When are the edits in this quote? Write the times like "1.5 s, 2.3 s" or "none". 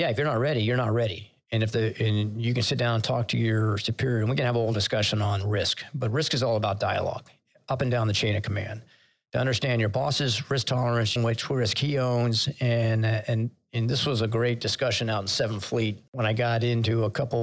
11.2 s